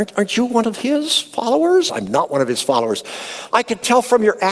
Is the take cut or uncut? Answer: cut